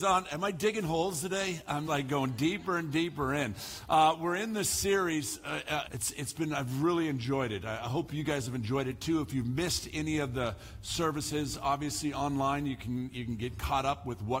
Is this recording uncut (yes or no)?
no